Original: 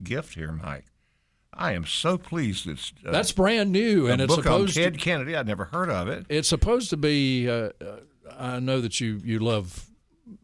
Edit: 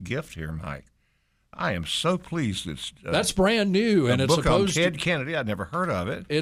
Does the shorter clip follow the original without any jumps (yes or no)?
yes